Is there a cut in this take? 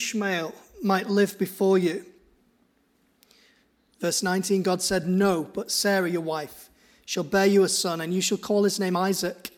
no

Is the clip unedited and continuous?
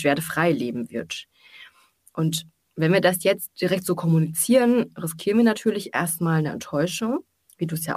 yes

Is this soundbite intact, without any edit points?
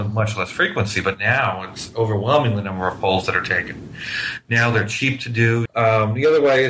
no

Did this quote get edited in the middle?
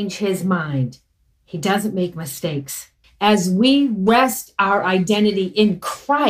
yes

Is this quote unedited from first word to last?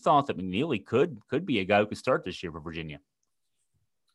yes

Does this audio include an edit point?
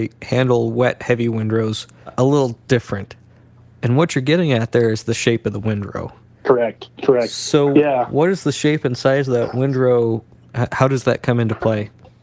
no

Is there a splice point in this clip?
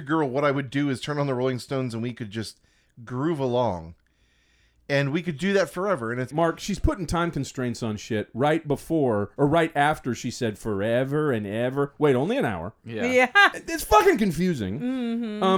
yes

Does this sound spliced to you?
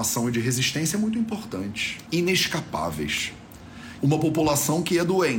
yes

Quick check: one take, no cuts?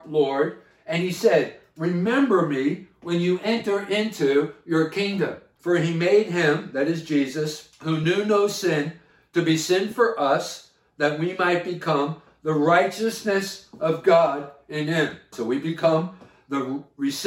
no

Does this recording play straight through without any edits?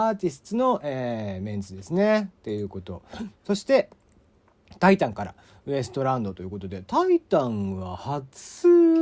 yes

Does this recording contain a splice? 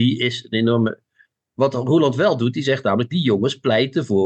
no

